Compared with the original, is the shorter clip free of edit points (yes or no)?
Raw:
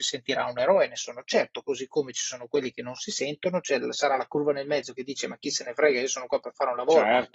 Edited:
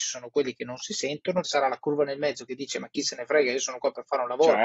no